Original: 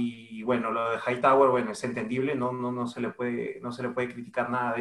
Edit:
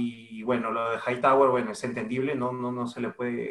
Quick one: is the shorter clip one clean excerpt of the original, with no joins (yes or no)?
yes